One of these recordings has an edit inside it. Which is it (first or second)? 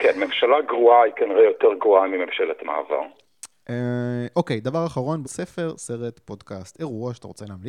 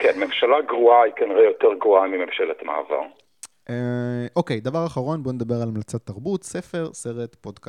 first